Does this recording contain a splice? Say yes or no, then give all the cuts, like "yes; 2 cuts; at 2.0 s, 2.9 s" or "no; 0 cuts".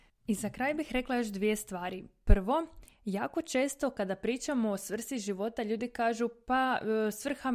no; 0 cuts